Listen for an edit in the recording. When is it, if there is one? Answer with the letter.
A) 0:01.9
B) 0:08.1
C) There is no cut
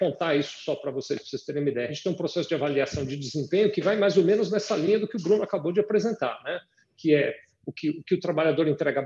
C